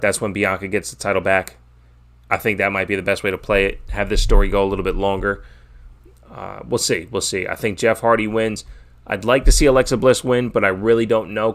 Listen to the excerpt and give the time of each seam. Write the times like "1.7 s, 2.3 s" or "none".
none